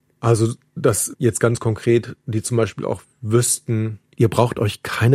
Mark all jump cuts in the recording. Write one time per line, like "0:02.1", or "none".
0:04.0